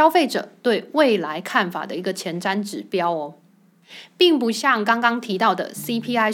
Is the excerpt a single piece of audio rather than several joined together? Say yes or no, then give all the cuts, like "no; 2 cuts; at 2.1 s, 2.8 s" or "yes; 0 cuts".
yes; 0 cuts